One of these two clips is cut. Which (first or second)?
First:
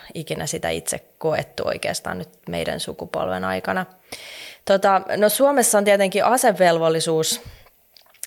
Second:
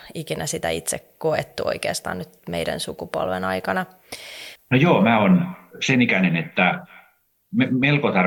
second